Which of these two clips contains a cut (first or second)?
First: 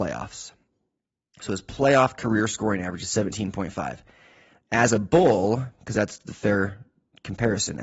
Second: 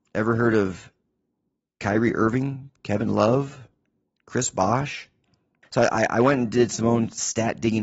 second